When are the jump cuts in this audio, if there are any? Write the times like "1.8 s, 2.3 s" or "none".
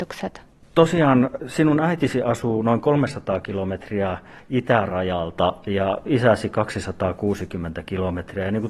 none